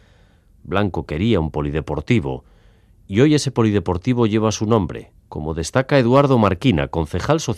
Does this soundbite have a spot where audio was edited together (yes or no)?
yes